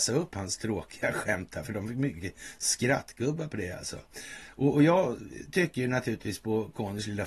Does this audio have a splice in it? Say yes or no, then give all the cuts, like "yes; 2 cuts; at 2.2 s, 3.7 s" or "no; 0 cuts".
no; 0 cuts